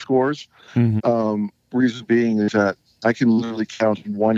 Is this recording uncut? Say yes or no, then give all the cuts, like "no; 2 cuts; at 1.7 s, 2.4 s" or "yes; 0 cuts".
no; 1 cut; at 1.0 s